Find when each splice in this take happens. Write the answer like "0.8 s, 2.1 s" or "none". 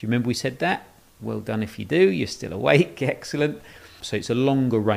4.0 s